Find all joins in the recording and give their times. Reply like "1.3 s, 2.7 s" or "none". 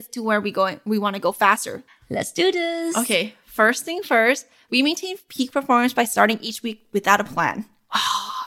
1.9 s